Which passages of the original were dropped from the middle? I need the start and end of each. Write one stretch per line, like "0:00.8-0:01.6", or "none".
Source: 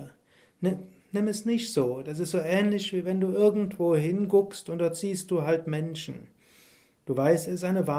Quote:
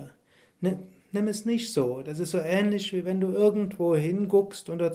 none